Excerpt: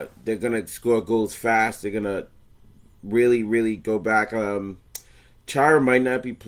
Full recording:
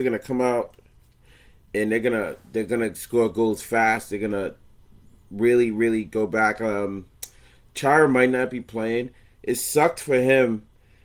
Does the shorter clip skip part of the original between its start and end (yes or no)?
no